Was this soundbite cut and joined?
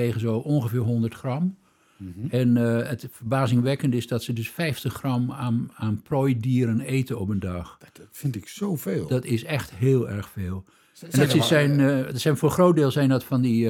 no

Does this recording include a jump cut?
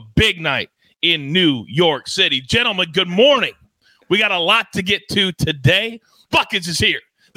yes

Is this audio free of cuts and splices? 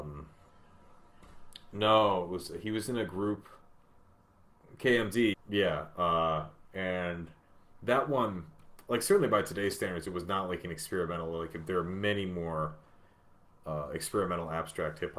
no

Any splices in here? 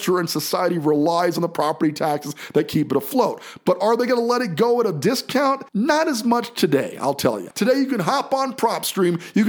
yes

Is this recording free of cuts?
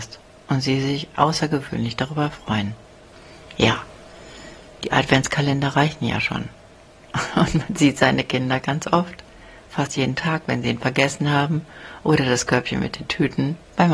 yes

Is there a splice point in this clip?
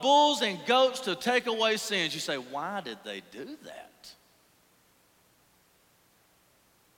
no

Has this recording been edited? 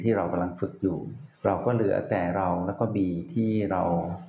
yes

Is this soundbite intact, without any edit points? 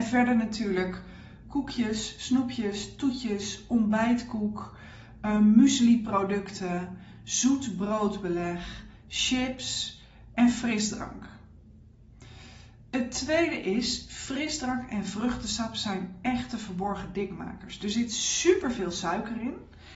yes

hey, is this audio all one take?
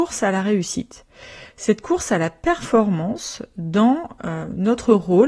yes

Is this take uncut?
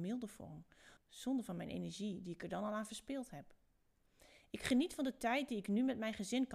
no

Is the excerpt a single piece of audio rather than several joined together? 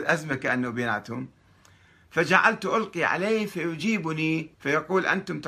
no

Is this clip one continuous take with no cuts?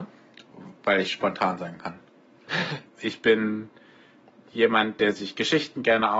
no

